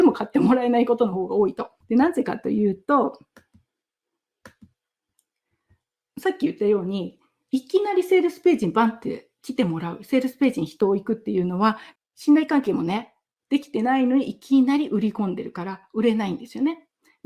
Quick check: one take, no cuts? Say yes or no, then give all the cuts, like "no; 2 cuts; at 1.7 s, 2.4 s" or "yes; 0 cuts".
no; 3 cuts; at 1.8 s, 12.0 s, 13.4 s